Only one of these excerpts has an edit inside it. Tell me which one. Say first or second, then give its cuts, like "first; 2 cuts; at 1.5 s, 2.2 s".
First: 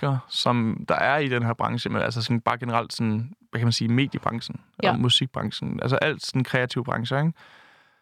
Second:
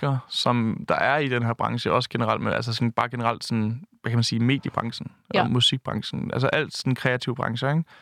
first; 1 cut; at 1.9 s